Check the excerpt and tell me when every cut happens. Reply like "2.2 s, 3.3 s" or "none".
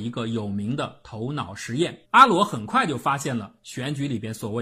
2.0 s